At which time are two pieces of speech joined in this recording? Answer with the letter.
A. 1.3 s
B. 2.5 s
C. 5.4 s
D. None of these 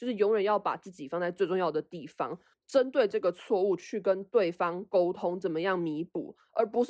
B